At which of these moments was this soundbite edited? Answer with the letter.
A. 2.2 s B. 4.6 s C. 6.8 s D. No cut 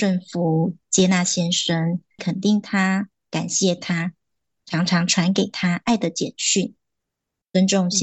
A